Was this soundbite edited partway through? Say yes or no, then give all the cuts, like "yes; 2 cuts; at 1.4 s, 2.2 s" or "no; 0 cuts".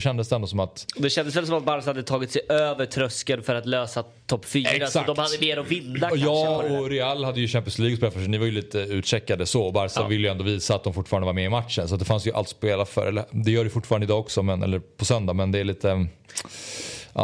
no; 0 cuts